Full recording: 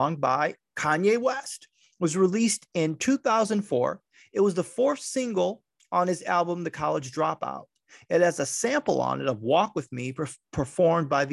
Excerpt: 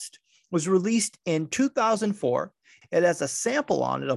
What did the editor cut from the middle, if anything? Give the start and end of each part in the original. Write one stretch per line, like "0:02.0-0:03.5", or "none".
0:04.3-0:08.0